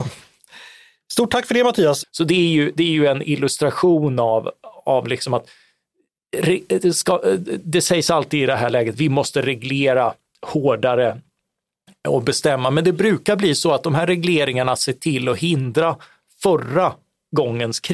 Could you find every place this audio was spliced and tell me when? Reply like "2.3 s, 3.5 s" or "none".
2.0 s